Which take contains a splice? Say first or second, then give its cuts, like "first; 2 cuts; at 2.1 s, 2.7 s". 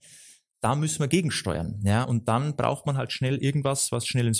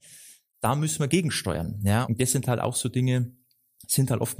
second; 1 cut; at 2.0 s